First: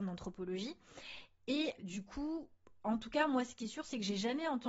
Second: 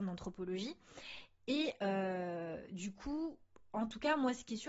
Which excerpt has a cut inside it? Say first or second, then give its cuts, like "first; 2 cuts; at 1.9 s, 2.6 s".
first; 1 cut; at 1.8 s